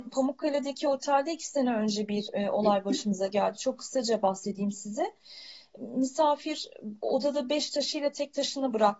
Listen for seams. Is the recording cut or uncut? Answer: cut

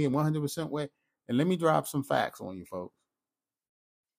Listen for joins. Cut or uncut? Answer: uncut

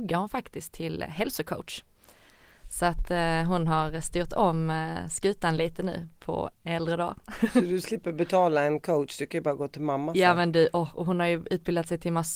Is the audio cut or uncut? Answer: uncut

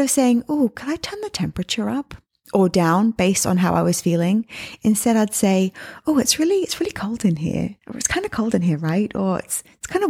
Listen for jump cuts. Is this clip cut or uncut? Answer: cut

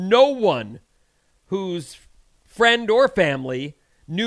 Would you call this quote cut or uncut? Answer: uncut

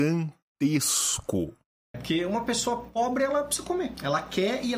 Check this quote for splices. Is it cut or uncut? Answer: cut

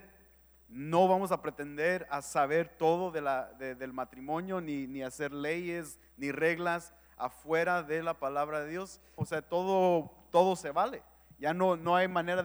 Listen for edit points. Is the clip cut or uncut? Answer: cut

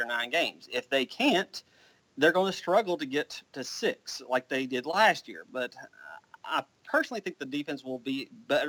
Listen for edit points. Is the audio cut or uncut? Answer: uncut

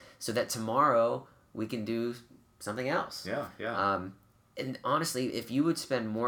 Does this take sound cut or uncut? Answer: uncut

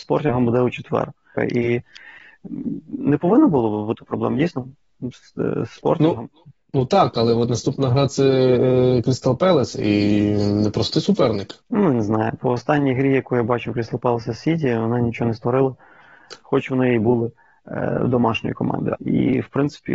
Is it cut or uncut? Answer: cut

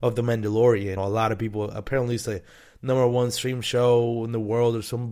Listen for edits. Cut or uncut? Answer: cut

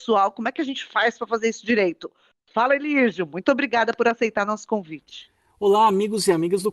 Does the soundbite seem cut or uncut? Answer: uncut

